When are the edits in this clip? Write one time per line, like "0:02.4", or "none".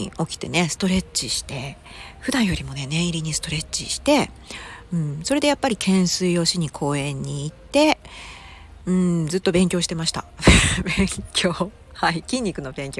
none